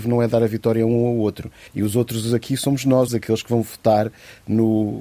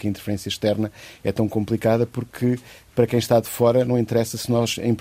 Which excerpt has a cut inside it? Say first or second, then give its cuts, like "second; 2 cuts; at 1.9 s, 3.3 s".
first; 2 cuts; at 1.7 s, 3.1 s